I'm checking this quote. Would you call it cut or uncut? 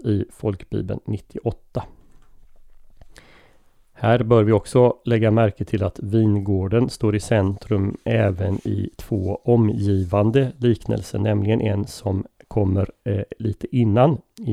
uncut